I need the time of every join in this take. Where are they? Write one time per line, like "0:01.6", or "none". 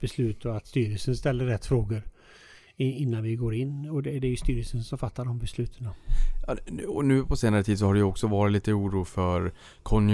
none